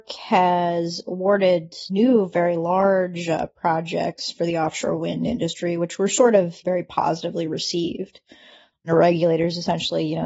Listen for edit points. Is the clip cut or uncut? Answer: cut